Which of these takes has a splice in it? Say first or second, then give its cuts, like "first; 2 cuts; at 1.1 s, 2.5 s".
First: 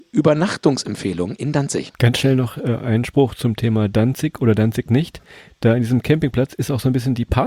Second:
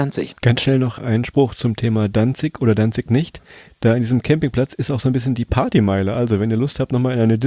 second; 1 cut; at 1.0 s